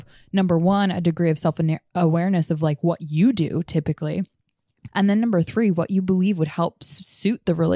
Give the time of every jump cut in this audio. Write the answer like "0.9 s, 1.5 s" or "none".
4.9 s